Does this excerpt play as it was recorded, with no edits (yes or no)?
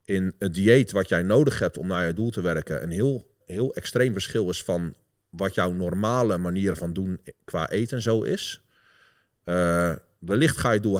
no